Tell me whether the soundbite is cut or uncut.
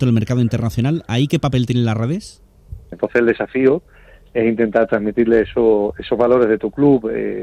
cut